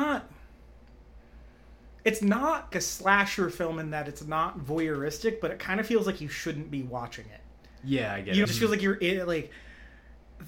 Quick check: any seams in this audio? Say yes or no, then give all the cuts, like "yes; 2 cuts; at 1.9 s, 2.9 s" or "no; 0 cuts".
yes; 2 cuts; at 2.7 s, 8.4 s